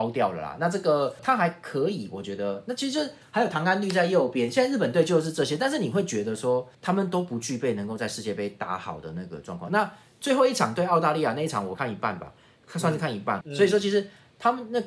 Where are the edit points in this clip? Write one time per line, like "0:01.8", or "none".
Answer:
0:06.7
0:11.7
0:13.4